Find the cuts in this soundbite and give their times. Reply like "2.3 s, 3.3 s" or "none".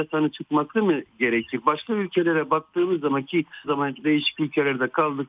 3.6 s